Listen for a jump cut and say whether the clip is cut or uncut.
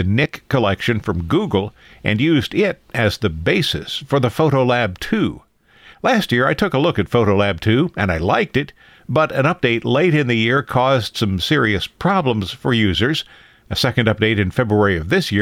uncut